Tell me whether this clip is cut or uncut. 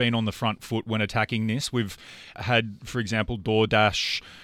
uncut